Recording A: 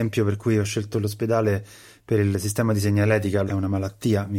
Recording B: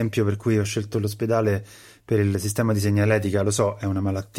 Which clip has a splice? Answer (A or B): A